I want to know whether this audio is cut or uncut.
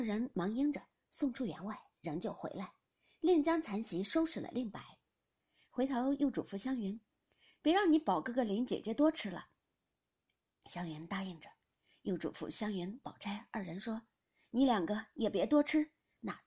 cut